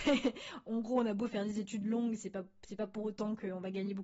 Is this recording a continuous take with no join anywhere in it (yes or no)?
yes